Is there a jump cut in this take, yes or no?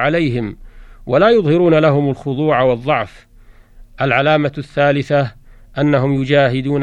no